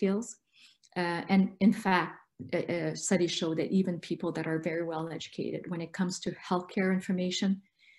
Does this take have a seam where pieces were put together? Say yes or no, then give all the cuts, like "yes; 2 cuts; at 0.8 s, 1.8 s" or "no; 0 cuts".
no; 0 cuts